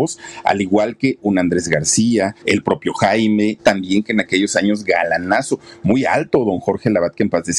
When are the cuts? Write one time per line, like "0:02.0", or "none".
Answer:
0:02.4
0:03.6